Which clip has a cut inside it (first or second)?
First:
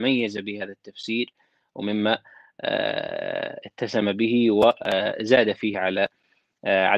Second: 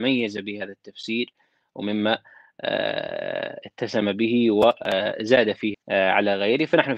second